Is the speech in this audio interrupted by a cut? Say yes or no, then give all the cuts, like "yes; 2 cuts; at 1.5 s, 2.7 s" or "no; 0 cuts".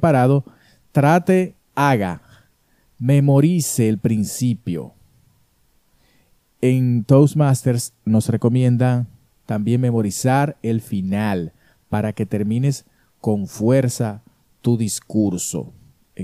yes; 1 cut; at 1.7 s